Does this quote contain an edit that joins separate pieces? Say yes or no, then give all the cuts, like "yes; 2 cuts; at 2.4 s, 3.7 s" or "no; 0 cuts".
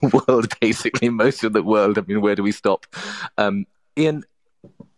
no; 0 cuts